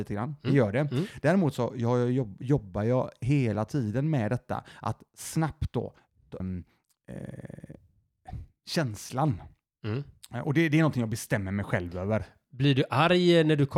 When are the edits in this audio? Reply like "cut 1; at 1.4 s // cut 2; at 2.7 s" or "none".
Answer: cut 1; at 6.4 s

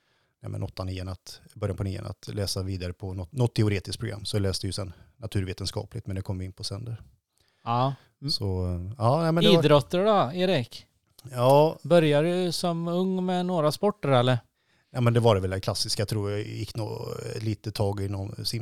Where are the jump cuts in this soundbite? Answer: none

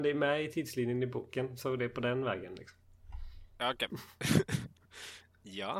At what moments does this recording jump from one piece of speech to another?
cut 1; at 3.9 s

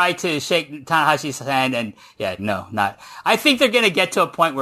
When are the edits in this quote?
cut 1; at 2.4 s

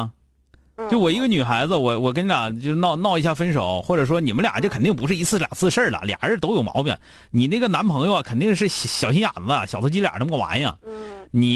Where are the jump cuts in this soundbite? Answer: cut 1; at 3.0 s

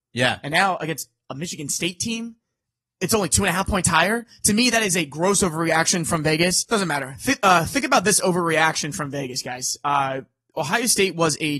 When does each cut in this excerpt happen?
cut 1; at 6.7 s

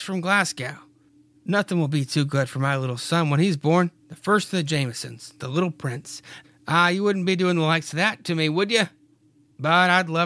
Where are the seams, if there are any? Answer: cut 1; at 4.0 s // cut 2; at 6.4 s

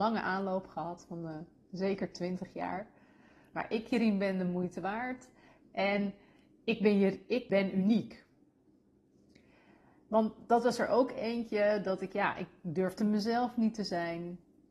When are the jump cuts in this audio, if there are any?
cut 1; at 7.5 s

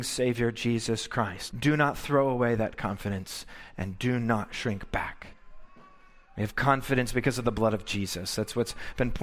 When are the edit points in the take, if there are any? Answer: cut 1; at 1.5 s

